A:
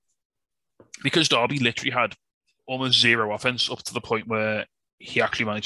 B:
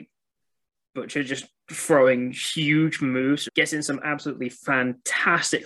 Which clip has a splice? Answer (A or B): B